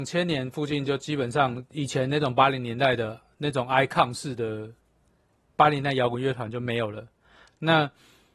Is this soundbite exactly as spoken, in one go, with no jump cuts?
yes; 0 cuts

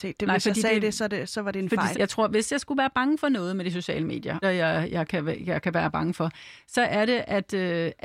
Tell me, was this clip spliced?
yes; 2 cuts; at 1.9 s, 4.4 s

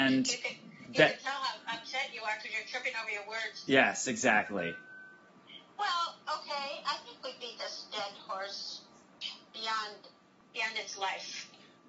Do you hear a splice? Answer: no; 0 cuts

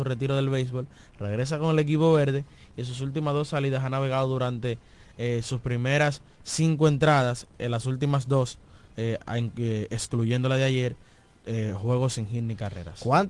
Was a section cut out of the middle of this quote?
no; 0 cuts

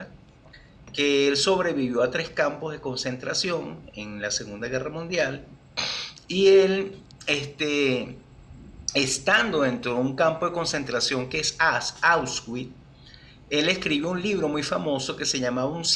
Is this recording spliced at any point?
no; 0 cuts

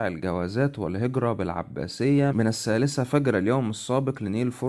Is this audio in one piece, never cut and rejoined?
no; 1 cut; at 2.3 s

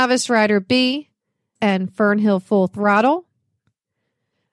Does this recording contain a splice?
yes; 1 cut; at 1.6 s

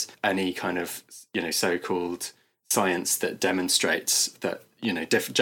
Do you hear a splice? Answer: no; 0 cuts

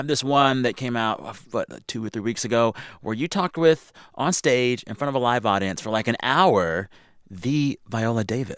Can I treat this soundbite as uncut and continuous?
yes; 0 cuts

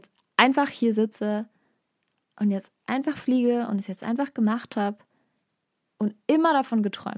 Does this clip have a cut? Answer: no; 0 cuts

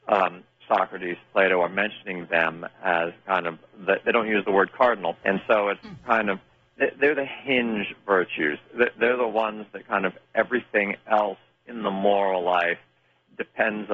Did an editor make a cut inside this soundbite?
yes; 1 cut; at 5.1 s

